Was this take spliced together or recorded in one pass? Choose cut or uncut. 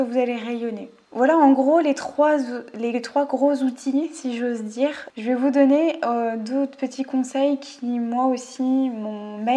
uncut